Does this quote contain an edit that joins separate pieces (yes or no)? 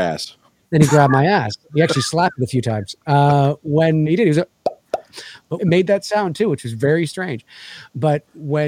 yes